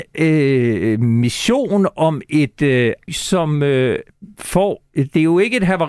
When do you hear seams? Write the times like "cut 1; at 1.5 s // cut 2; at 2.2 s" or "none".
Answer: cut 1; at 3.1 s